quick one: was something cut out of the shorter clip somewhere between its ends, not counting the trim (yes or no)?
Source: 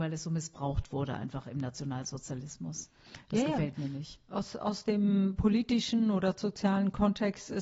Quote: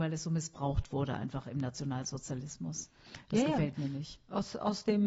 no